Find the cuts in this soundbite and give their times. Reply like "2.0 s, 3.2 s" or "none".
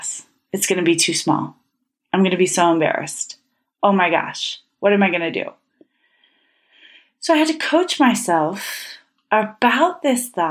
none